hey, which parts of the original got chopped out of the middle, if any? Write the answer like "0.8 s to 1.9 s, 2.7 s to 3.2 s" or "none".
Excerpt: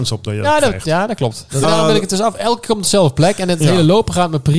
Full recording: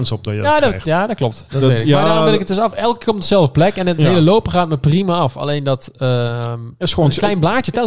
1.6 s to 2.0 s